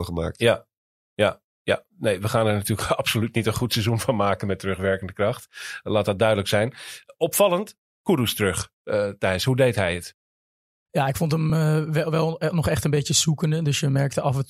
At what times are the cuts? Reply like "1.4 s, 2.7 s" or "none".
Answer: none

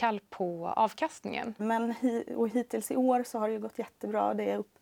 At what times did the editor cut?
1.6 s

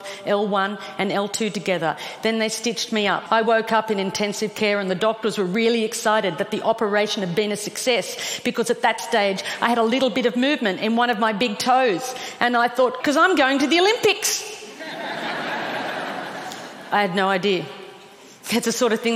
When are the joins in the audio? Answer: 3.3 s, 13.0 s

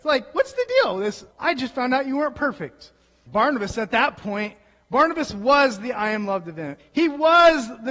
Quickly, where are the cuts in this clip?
1.3 s, 3.3 s, 6.8 s

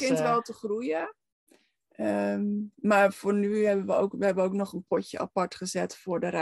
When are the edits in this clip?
none

